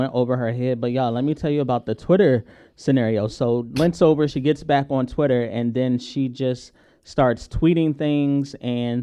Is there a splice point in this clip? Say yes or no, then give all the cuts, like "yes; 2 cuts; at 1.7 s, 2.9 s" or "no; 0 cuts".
no; 0 cuts